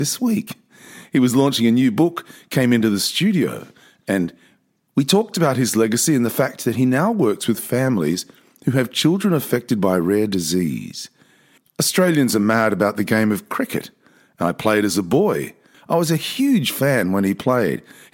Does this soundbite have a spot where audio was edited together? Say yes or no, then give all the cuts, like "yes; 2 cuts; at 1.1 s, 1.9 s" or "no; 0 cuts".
yes; 2 cuts; at 11.6 s, 15.7 s